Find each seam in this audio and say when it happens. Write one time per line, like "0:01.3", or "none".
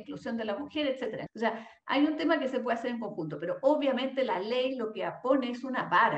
0:01.3